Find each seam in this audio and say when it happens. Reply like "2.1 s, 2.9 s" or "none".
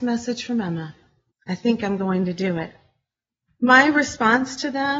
1.3 s, 3.5 s

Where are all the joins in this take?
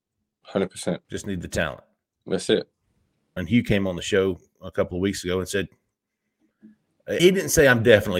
1.0 s, 3.4 s, 7.2 s

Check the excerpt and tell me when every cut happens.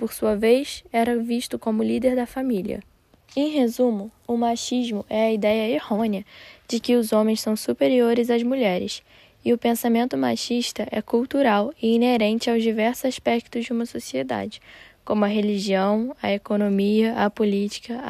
3.2 s

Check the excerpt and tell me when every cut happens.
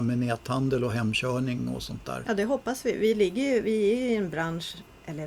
2.2 s

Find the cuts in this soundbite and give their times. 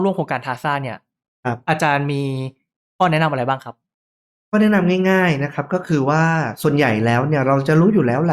none

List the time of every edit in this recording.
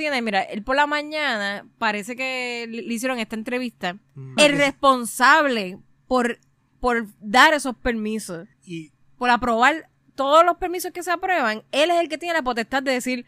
4.4 s, 8.5 s

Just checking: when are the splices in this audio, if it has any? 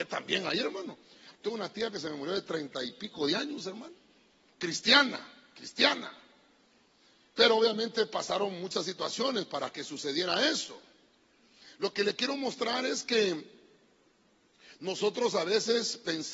1.3 s

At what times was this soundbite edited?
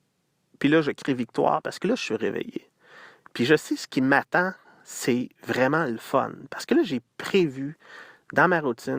none

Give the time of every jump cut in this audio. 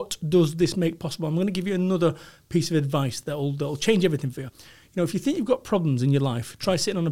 none

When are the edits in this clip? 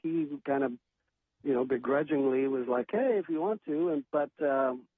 2.8 s

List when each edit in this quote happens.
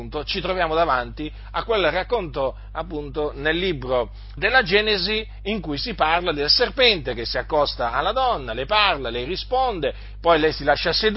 4.4 s

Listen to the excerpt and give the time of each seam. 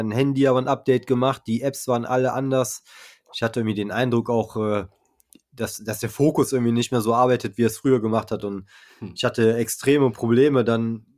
none

